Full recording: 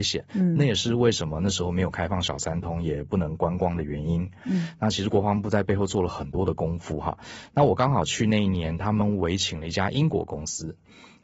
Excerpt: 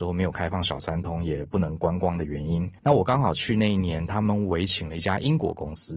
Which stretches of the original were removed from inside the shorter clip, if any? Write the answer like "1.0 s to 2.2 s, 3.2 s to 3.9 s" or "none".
4.4 s to 7.5 s